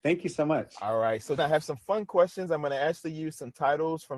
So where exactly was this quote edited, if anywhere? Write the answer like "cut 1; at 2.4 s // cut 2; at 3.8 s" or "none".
cut 1; at 1.4 s